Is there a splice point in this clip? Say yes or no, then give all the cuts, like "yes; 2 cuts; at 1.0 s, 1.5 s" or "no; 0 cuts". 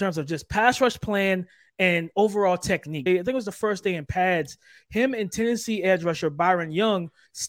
yes; 1 cut; at 3.1 s